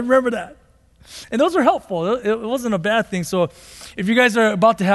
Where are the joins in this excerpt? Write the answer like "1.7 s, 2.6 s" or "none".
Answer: none

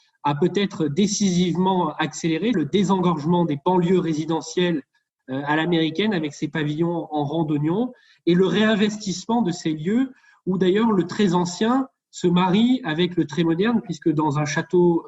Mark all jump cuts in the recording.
2.5 s

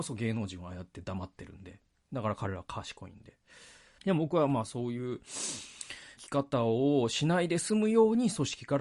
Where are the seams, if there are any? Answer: 4.0 s, 6.2 s

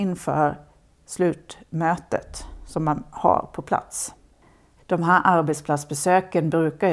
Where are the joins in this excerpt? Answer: 4.8 s

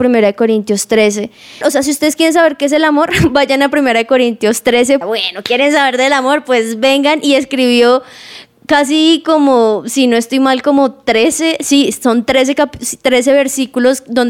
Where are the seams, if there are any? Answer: 1.6 s, 5.0 s

